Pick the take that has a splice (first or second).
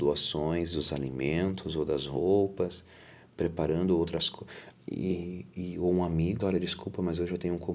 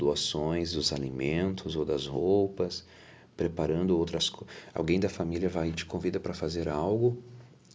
first